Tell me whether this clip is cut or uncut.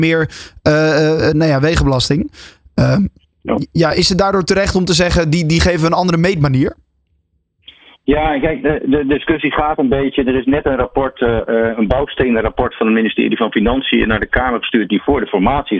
uncut